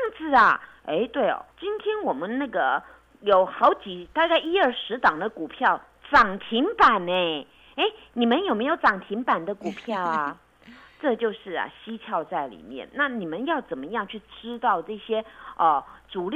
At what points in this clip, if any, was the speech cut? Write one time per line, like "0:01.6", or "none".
0:01.5